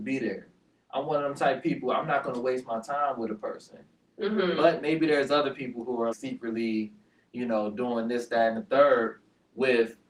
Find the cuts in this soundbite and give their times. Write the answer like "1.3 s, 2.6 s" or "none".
6.1 s